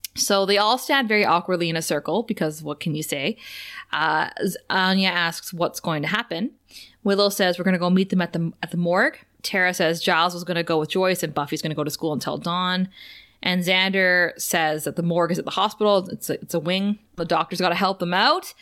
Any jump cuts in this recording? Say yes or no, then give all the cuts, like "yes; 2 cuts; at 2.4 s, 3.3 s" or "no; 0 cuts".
yes; 1 cut; at 17.2 s